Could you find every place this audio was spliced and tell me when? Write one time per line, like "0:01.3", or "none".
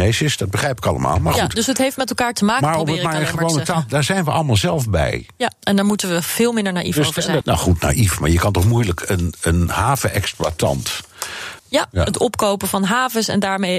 0:07.4
0:11.6